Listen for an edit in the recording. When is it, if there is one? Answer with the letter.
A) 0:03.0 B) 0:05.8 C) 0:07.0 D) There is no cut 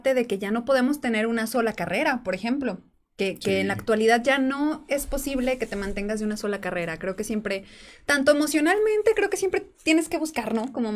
D